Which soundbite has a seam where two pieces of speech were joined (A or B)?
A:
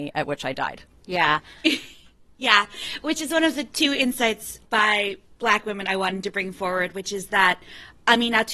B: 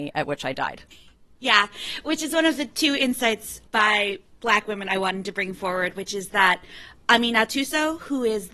B